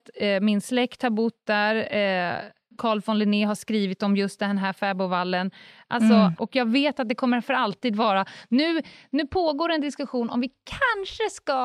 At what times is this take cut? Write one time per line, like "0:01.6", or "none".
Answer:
0:02.8
0:06.4